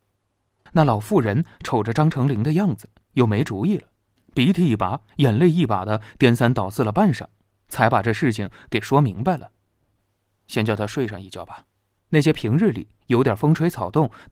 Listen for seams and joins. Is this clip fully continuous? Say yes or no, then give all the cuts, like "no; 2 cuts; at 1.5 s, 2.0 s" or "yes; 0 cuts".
no; 2 cuts; at 10.0 s, 12.1 s